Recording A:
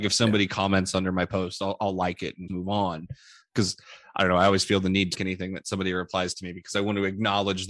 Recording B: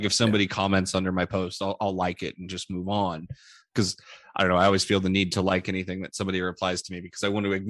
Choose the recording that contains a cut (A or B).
A